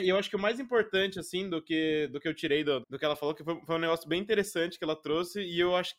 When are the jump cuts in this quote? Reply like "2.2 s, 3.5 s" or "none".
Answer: 2.8 s